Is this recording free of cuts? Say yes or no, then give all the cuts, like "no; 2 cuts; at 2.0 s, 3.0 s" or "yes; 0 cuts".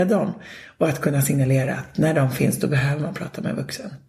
yes; 0 cuts